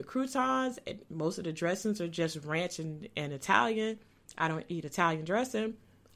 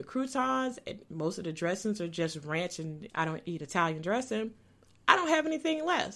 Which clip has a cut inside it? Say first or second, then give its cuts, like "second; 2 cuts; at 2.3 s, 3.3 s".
second; 1 cut; at 3.1 s